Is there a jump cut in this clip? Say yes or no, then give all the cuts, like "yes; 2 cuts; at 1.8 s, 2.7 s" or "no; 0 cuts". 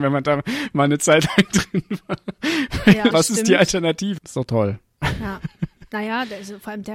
yes; 2 cuts; at 3.1 s, 4.2 s